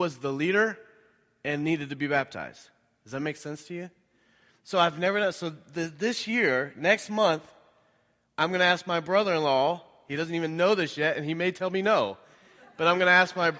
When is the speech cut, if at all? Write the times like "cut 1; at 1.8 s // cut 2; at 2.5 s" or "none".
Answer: none